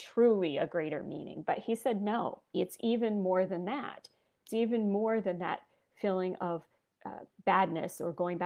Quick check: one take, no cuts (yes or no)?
no